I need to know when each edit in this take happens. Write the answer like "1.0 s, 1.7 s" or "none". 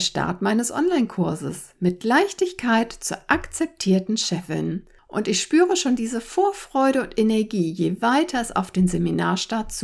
none